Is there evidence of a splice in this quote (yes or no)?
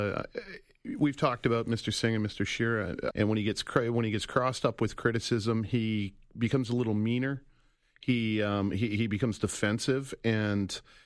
yes